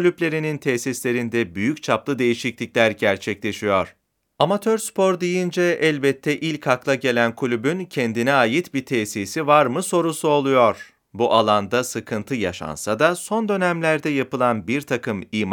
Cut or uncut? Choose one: cut